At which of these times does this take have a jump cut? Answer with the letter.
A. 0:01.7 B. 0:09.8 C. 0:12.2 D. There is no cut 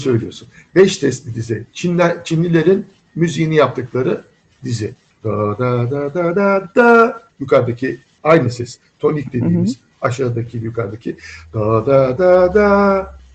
C